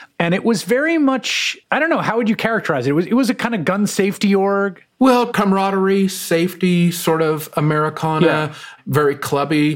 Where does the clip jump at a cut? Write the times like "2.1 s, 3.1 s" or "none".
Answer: 1.6 s